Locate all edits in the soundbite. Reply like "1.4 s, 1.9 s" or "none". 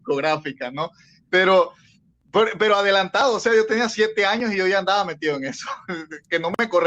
none